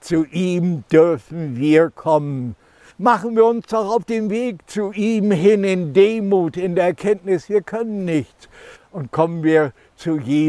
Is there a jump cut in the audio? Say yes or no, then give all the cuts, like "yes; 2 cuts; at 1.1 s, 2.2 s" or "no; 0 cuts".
yes; 2 cuts; at 2.9 s, 8.8 s